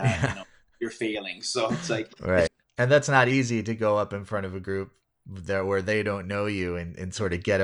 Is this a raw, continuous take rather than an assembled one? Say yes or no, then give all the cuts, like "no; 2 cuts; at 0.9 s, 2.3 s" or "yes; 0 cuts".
no; 1 cut; at 2.5 s